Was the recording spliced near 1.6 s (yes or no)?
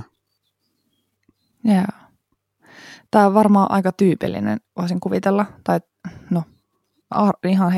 no